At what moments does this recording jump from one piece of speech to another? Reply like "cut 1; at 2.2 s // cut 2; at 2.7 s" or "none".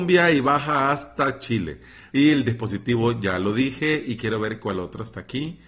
cut 1; at 2.1 s